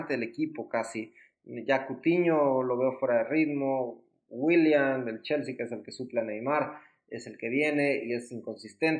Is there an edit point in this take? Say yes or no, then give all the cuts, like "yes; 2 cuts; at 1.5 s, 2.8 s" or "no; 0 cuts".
no; 0 cuts